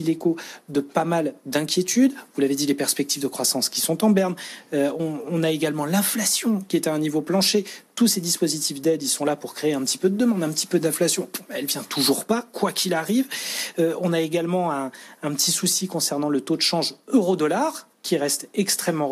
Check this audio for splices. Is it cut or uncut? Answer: uncut